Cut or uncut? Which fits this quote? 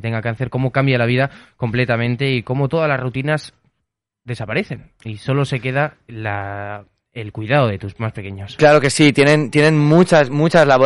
uncut